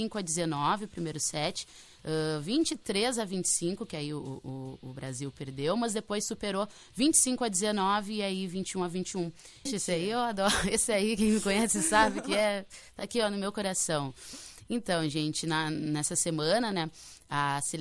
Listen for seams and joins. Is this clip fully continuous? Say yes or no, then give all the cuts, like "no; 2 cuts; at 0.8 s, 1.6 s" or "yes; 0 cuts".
no; 2 cuts; at 9.7 s, 16.7 s